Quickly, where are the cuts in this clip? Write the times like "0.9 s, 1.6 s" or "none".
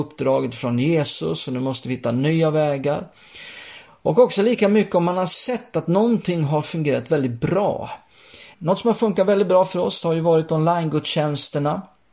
8.5 s